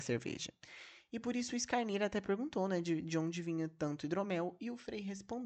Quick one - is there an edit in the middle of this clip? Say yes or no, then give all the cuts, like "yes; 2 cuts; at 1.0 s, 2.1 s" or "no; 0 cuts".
no; 0 cuts